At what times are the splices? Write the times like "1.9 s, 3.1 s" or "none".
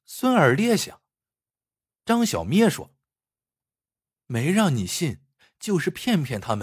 1.3 s

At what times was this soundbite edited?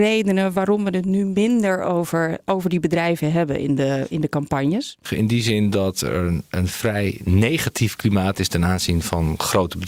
5.1 s

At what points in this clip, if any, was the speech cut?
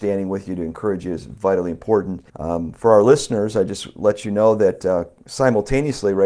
2.3 s

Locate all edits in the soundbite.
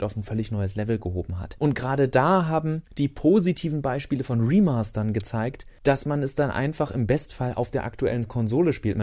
1.6 s

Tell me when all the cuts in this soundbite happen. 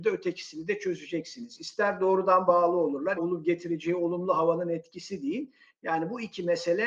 3.2 s

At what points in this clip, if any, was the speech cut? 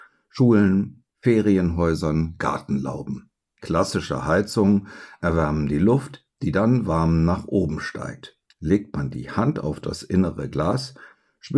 3.4 s, 8.5 s

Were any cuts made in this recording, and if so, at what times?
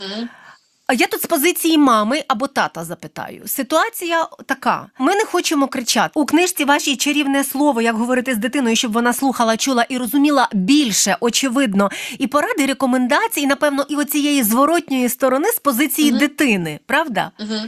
5.0 s, 6.1 s

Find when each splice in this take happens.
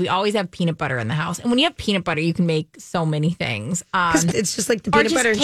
4.3 s

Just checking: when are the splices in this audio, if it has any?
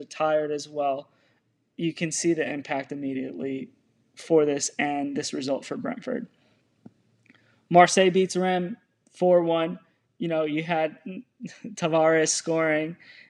none

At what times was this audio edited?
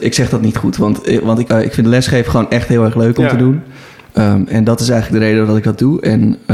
1.5 s

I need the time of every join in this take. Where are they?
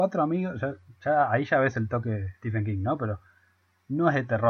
none

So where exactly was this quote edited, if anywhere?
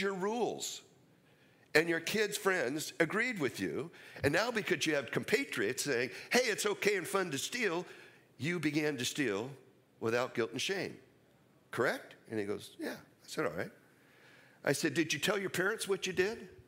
none

